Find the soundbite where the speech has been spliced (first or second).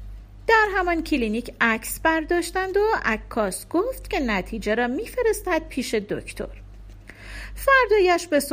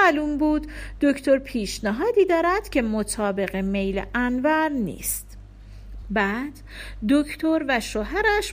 second